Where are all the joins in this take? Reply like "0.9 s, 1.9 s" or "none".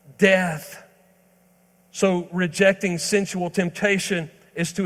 none